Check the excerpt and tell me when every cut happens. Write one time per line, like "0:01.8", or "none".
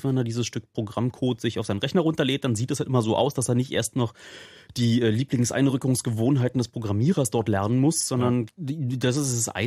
0:08.5